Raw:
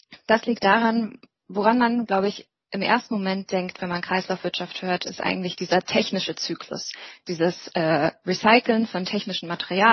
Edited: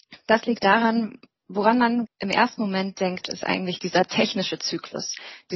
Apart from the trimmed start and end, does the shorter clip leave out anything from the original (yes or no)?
yes